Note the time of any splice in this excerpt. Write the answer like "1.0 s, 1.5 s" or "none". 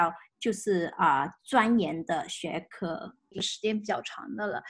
3.3 s